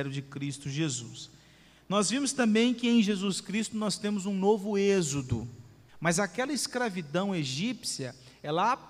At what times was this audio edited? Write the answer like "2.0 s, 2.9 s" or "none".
5.9 s